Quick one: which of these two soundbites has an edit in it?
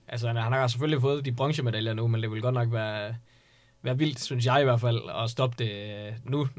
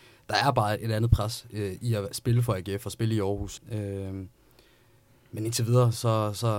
second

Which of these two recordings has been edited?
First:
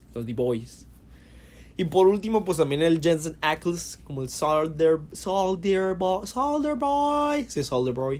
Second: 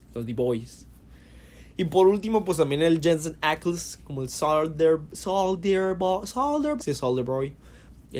second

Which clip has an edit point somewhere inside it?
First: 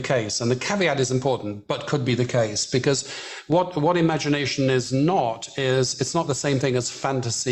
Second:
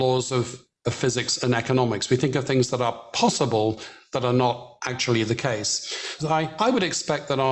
second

